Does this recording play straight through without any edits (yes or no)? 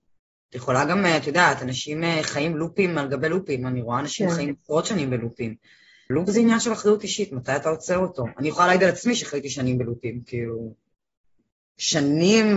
yes